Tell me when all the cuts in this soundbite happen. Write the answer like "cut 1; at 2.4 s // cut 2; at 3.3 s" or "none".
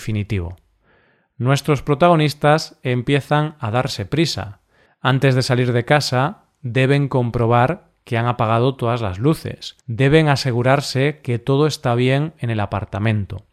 cut 1; at 4.9 s // cut 2; at 9.8 s